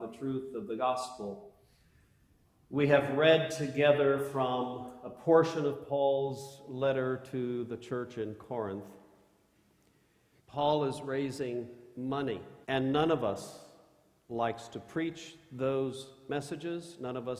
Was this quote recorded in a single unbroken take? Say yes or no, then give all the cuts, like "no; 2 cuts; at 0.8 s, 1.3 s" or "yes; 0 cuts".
no; 2 cuts; at 10.4 s, 12.6 s